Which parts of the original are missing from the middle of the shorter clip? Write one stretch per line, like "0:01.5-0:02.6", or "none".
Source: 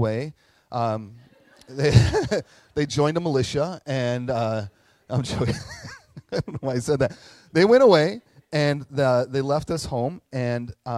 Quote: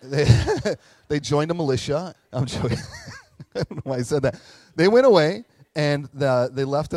0:03.8-0:04.9